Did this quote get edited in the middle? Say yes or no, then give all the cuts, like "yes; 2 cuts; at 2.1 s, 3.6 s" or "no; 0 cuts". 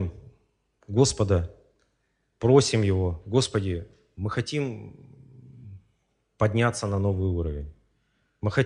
no; 0 cuts